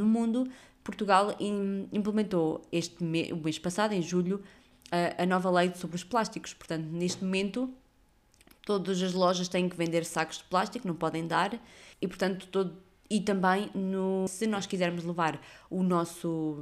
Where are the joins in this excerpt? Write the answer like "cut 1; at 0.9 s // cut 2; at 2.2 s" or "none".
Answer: cut 1; at 11.9 s // cut 2; at 14.3 s